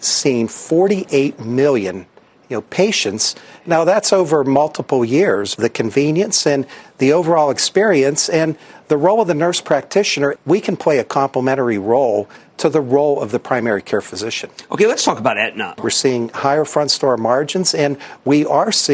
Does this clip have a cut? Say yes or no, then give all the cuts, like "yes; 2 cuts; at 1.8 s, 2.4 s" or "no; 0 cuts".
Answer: yes; 3 cuts; at 5.6 s, 10.4 s, 15.8 s